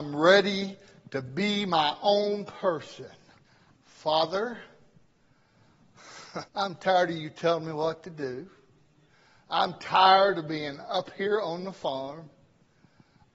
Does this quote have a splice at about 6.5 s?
yes; 2 cuts; at 3.8 s, 6.5 s

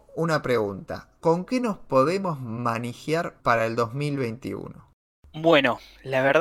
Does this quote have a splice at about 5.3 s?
no; 1 cut; at 3.4 s

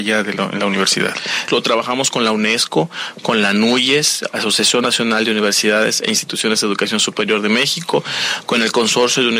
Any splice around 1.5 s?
yes; 1 cut; at 1.5 s

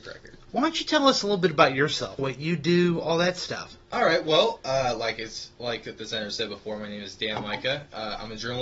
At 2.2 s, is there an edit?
yes; 1 cut; at 2.2 s

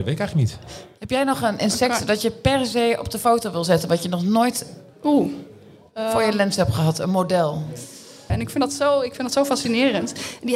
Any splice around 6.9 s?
no; 1 cut; at 8.3 s

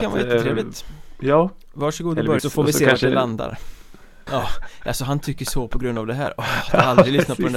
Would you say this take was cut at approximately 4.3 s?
yes; 2 cuts; at 2.4 s, 4.3 s

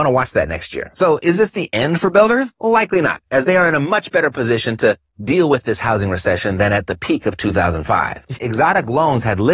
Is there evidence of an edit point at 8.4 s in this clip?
yes; 1 cut; at 8.4 s

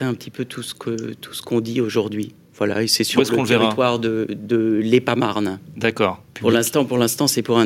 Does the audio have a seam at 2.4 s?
no; 1 cut; at 6.3 s

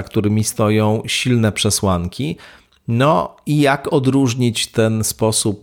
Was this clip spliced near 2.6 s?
no; 0 cuts

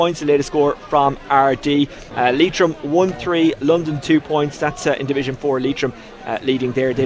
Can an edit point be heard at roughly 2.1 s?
yes; 1 cut; at 2.1 s

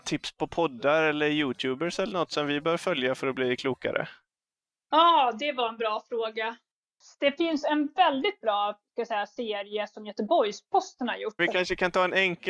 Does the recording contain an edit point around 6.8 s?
no; 1 cut; at 11.4 s

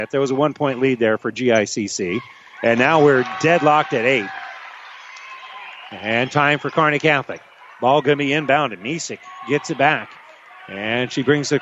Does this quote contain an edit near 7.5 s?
no; 0 cuts

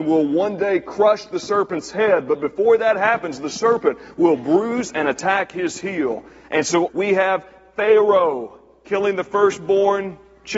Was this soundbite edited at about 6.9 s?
yes; 1 cut; at 6.9 s

